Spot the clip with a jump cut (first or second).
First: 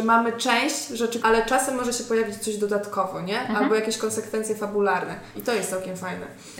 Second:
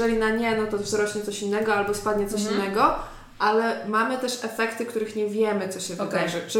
first